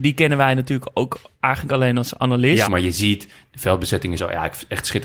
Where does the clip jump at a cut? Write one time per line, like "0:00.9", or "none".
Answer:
0:02.7
0:04.2